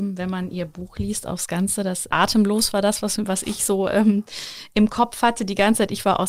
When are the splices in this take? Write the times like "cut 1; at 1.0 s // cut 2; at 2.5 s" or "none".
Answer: cut 1; at 2.1 s